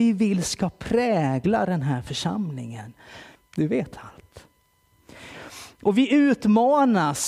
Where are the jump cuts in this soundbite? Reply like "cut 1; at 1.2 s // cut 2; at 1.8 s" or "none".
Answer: cut 1; at 3.3 s